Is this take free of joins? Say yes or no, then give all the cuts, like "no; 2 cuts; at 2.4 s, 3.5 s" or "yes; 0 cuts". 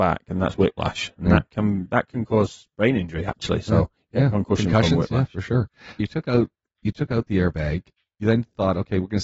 no; 1 cut; at 6.0 s